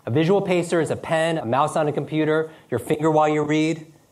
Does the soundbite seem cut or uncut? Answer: cut